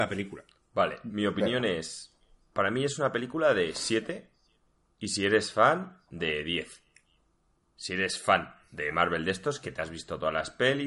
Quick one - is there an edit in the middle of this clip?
no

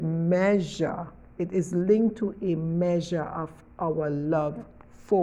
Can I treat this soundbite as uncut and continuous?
no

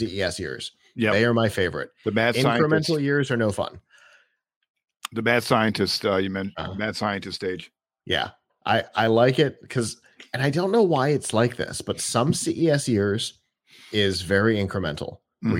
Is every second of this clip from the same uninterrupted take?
yes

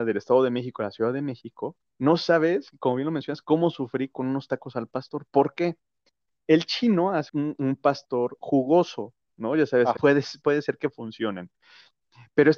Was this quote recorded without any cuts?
no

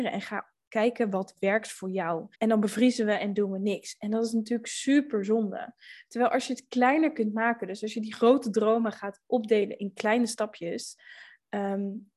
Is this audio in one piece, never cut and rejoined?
no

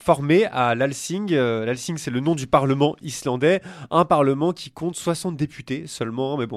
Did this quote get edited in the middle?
no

